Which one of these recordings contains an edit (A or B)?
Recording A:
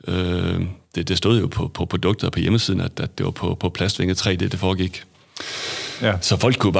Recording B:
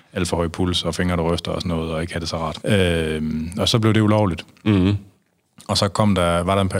B